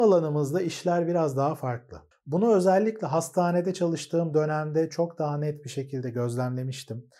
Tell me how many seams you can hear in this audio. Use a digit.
1